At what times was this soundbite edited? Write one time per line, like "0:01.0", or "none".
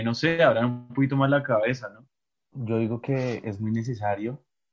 0:02.5